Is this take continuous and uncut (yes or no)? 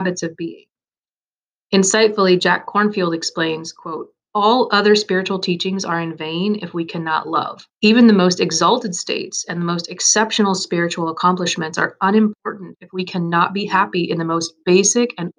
no